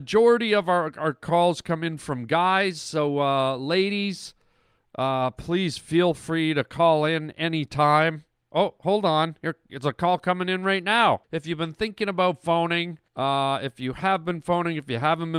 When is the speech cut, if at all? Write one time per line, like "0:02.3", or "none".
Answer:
0:11.2
0:13.1